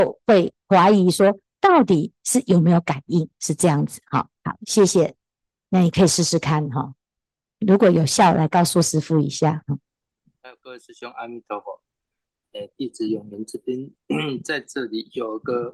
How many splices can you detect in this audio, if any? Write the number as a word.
one